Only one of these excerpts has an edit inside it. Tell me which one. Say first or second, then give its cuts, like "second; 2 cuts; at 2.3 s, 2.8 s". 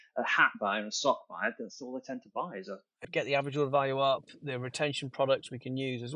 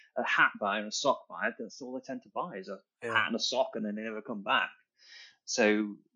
first; 1 cut; at 3.0 s